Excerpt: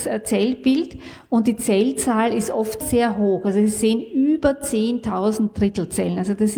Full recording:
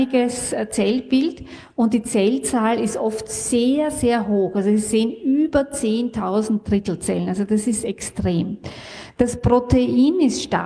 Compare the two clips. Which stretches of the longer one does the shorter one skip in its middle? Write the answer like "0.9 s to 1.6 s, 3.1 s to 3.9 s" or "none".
3.3 s to 3.9 s